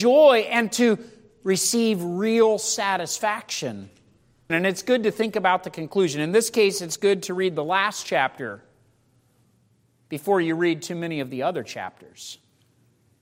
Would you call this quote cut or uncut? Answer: cut